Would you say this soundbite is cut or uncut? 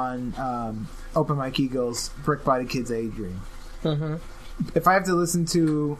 cut